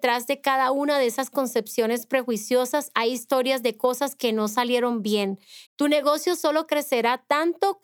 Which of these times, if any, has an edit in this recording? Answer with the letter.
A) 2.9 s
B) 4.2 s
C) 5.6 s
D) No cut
C